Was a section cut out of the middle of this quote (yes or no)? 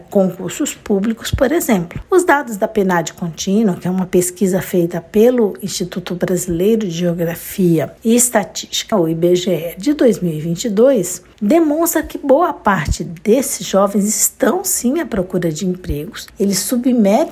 yes